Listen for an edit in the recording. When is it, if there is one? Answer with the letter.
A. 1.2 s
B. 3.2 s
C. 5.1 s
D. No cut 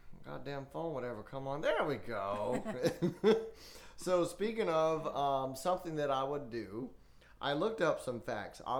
D